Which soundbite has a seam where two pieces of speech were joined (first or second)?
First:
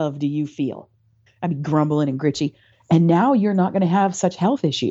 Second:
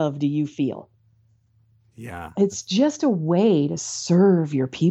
first